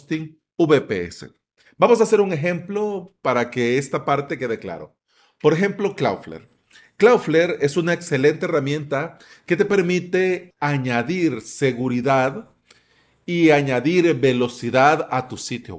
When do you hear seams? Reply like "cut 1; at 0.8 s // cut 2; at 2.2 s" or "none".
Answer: cut 1; at 10.5 s